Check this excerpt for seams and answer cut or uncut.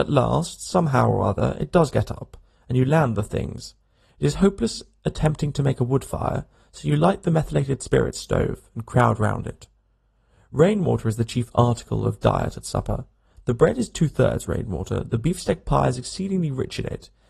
uncut